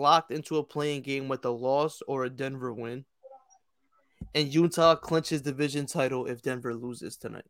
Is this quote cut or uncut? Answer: uncut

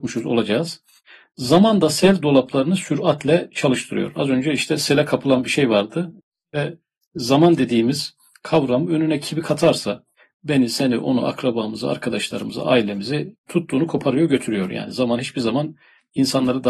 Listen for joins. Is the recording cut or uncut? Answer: uncut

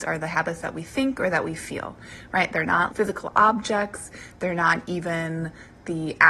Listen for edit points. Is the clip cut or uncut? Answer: cut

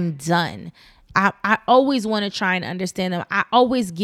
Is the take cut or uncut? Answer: cut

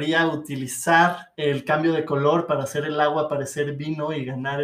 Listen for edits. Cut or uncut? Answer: cut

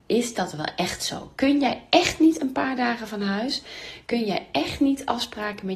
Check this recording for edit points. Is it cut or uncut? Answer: uncut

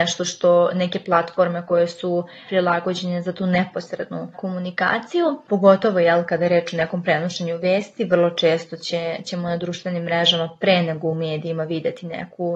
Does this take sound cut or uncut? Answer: uncut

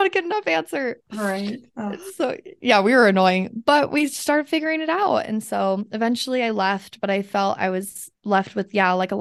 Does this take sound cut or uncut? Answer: uncut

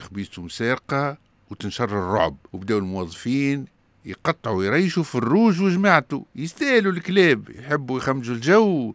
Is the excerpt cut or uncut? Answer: cut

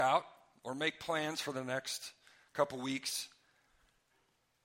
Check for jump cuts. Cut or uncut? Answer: uncut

